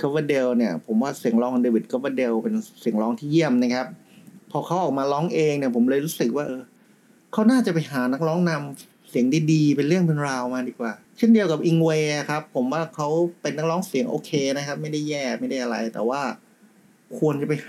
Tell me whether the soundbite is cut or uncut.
cut